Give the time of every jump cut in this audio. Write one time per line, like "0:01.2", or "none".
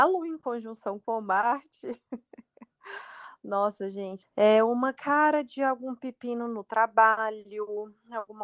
0:04.2